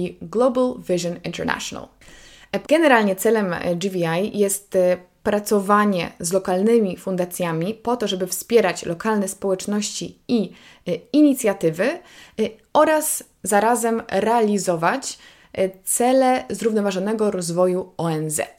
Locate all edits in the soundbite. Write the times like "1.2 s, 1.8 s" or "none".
2.6 s